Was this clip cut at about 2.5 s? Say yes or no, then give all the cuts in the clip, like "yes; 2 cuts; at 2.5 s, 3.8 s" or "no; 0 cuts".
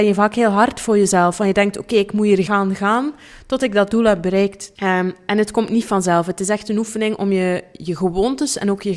yes; 2 cuts; at 2.5 s, 4.7 s